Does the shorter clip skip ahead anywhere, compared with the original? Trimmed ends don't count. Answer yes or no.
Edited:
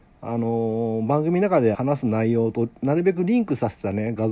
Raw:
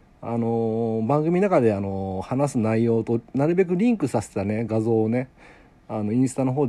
yes